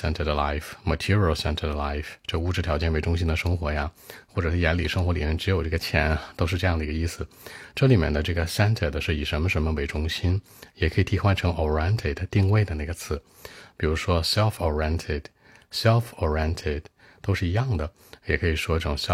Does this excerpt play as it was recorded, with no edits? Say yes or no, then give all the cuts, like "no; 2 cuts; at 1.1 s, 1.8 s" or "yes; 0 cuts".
yes; 0 cuts